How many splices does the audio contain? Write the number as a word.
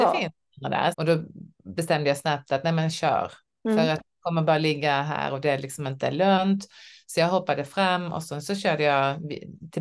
one